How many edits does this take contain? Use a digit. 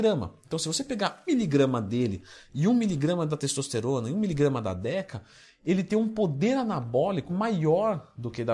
2